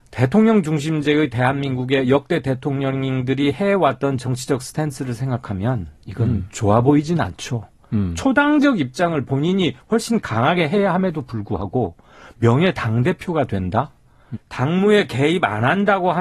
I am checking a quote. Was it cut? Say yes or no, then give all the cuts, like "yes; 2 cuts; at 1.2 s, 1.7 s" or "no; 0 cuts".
yes; 1 cut; at 14.3 s